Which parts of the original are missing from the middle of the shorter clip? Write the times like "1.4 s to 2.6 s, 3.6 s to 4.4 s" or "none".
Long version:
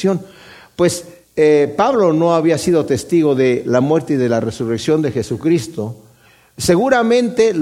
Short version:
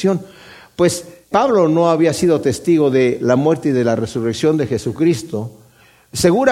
1.3 s to 1.8 s